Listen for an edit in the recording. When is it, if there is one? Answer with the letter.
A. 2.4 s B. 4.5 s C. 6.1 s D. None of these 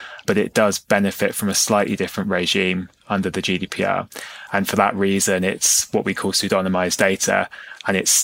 B